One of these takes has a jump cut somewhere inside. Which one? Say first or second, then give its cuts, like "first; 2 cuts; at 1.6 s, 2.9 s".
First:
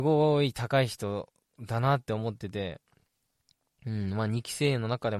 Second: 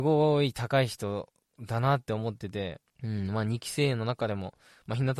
second; 1 cut; at 2.9 s